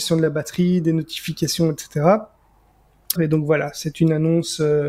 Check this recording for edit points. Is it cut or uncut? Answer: cut